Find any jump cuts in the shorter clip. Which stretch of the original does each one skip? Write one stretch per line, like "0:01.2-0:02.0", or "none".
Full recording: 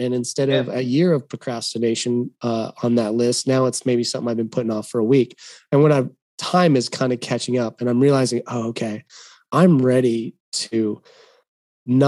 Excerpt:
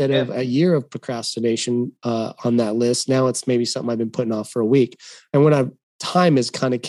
none